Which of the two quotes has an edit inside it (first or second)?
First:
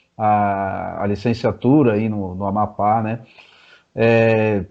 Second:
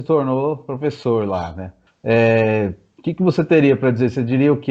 second